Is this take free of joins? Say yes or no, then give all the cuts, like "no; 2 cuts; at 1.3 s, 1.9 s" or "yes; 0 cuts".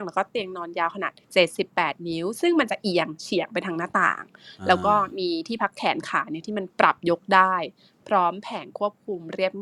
no; 1 cut; at 1.2 s